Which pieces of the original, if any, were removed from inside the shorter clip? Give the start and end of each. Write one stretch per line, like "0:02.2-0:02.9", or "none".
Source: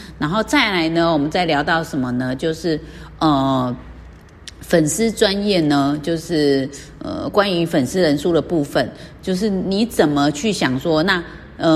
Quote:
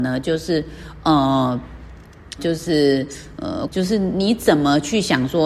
0:04.5-0:06.0
0:07.3-0:09.2